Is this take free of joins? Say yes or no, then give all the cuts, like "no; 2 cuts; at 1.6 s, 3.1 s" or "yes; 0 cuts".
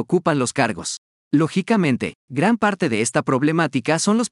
yes; 0 cuts